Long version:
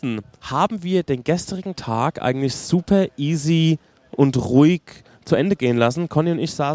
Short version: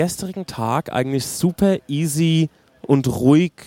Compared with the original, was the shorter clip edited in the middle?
no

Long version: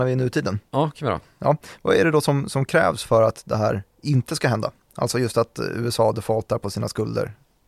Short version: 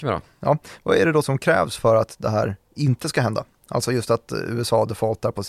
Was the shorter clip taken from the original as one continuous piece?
no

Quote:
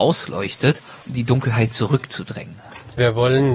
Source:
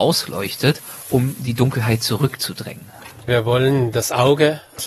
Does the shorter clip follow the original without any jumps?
no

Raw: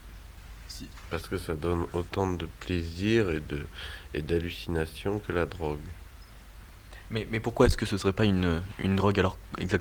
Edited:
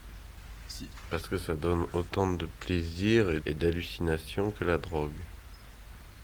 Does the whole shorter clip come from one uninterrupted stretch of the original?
no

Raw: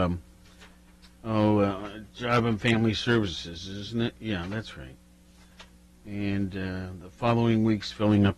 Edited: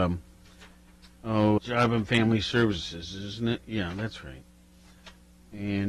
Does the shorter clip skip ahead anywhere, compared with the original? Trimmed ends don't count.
yes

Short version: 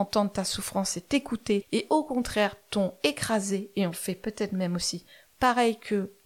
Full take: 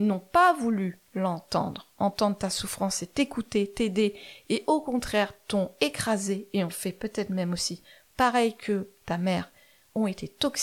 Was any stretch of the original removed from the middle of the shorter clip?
yes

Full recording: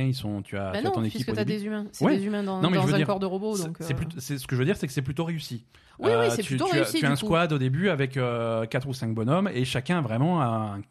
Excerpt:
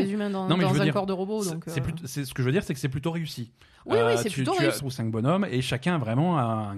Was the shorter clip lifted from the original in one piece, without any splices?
no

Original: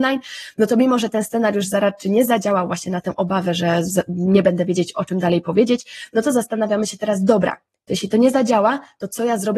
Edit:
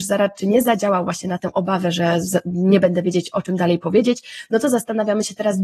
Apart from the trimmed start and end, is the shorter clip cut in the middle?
no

